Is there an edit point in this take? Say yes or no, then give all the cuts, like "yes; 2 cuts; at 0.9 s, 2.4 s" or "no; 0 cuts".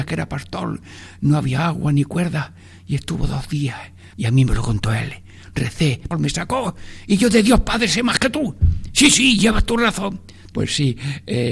yes; 3 cuts; at 4.1 s, 6.1 s, 10.5 s